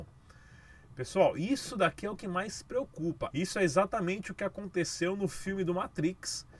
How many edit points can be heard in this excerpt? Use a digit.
1